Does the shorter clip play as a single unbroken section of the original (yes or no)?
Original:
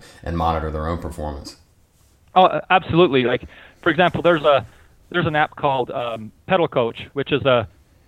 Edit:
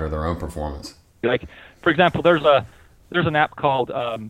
no